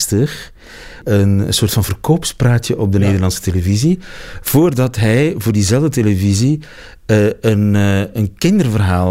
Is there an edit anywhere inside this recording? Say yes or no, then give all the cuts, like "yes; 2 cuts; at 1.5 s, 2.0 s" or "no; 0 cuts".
no; 0 cuts